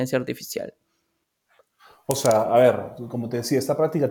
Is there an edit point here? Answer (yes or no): no